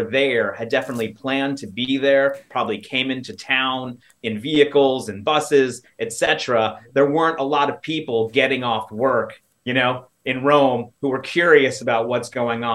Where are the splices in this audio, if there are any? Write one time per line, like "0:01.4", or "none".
none